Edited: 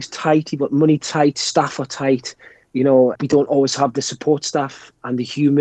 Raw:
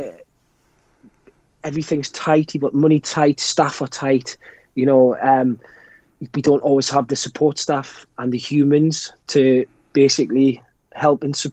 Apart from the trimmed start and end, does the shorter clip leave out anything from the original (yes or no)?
yes